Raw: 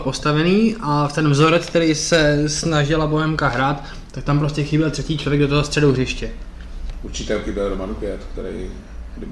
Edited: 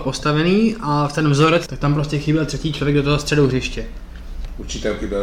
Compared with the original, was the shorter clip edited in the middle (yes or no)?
yes